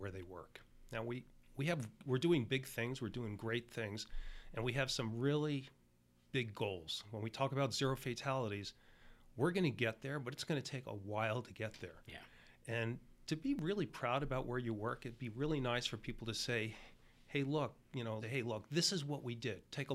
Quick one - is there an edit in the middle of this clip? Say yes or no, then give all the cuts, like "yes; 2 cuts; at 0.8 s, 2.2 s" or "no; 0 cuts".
yes; 1 cut; at 18.2 s